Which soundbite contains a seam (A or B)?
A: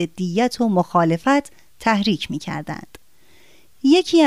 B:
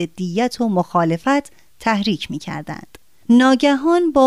B